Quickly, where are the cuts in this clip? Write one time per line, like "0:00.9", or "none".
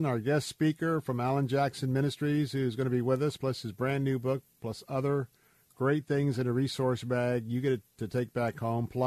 none